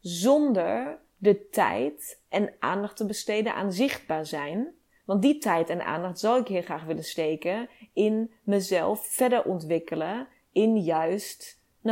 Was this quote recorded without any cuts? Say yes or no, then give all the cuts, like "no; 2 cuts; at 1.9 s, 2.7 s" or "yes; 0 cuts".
yes; 0 cuts